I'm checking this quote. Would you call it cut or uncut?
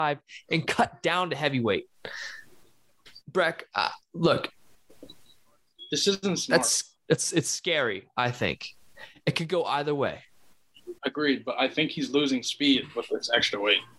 cut